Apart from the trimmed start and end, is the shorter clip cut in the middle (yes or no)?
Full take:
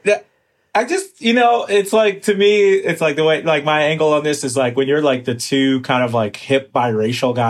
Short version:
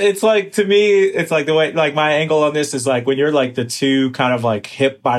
no